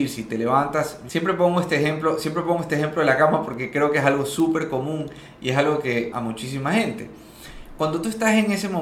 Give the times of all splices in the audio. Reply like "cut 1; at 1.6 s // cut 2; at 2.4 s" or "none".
cut 1; at 6.1 s